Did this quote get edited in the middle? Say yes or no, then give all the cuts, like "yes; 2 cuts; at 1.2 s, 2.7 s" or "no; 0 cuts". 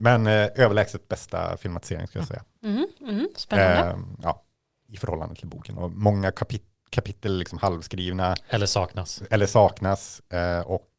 yes; 1 cut; at 5.8 s